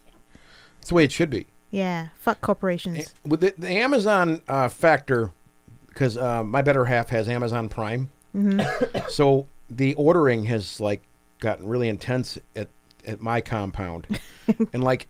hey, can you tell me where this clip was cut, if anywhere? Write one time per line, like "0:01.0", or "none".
none